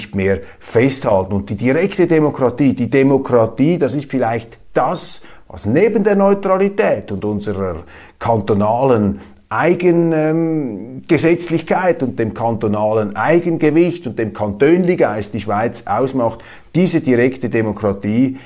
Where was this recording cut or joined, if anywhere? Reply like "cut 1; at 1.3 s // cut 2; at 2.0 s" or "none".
none